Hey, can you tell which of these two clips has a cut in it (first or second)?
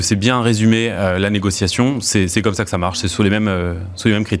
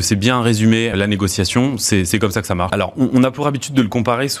second